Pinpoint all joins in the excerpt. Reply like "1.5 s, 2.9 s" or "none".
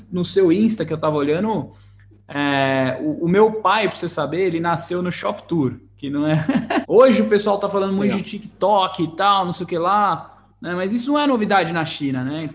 6.8 s